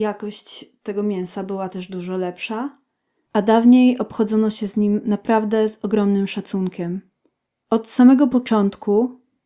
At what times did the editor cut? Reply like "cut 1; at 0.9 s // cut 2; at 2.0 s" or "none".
cut 1; at 3.3 s